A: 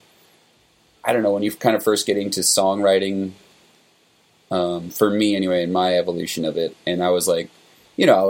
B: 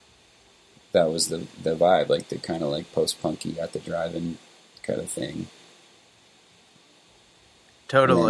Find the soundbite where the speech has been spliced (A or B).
A